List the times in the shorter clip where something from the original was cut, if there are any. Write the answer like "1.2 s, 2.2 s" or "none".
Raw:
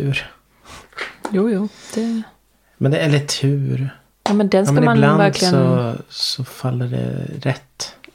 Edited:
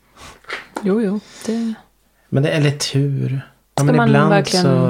3.8 s